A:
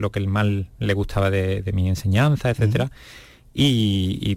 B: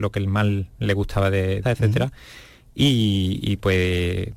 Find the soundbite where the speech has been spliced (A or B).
B